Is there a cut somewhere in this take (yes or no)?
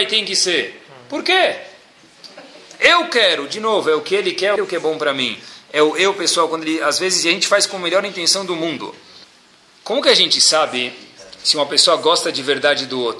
yes